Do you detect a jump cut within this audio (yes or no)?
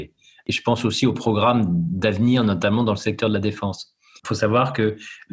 yes